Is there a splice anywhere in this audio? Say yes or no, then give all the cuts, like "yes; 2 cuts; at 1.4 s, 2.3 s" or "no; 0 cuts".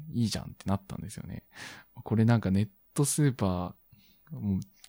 no; 0 cuts